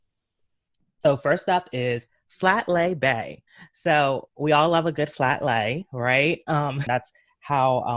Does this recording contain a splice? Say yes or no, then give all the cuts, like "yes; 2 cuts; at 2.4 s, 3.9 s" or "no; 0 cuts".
yes; 1 cut; at 6.9 s